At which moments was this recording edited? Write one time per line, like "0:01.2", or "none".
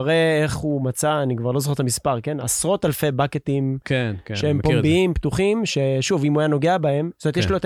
none